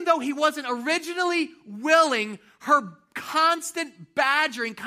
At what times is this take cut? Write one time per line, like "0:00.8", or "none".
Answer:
none